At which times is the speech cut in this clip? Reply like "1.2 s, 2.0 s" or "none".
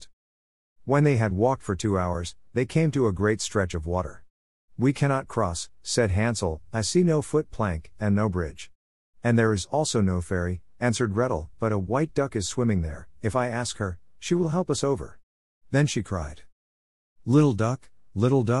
none